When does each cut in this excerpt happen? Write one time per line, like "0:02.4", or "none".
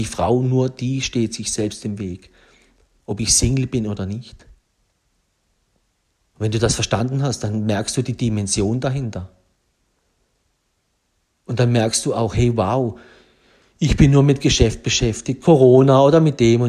0:03.0